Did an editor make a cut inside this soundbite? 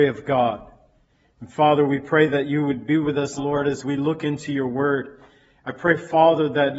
yes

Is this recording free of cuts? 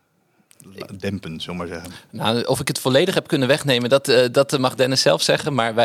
yes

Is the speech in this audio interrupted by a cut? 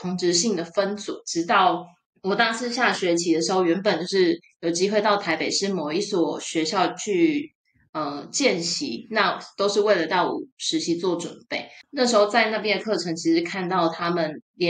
yes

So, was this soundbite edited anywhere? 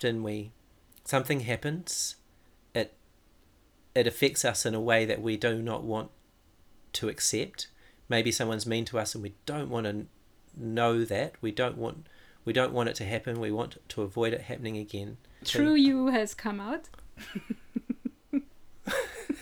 yes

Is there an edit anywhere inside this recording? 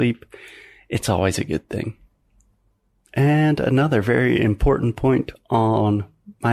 no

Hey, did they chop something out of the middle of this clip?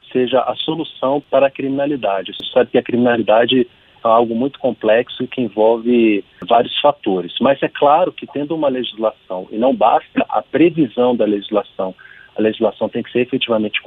no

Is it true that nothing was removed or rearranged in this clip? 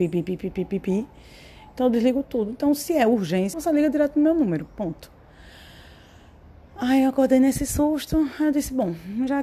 no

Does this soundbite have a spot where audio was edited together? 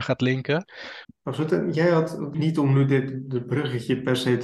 yes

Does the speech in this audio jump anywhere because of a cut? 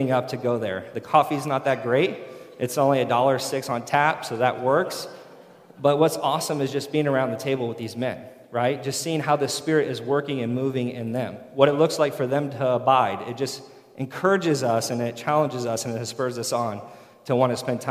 no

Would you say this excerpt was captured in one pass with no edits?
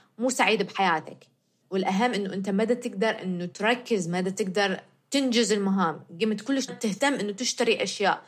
no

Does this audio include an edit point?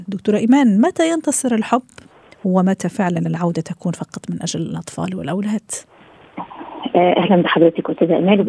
no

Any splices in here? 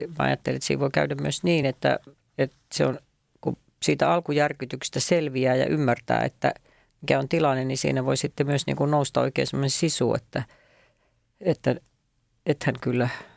no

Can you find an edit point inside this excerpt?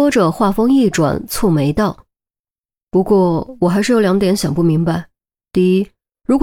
no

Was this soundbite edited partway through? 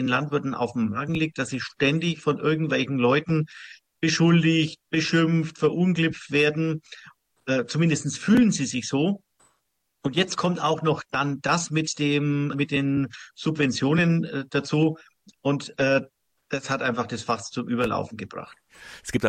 yes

